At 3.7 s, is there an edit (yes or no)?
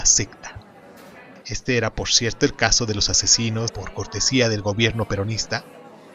yes